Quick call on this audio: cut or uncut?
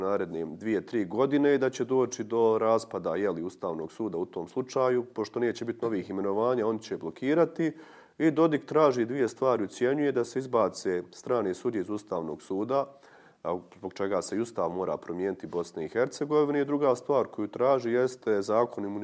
uncut